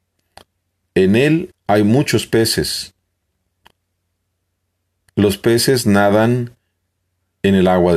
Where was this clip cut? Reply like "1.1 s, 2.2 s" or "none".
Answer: 1.5 s